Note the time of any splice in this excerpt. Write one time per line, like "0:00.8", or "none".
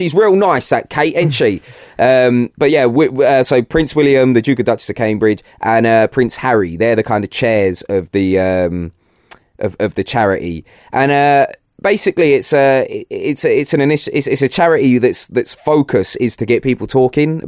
none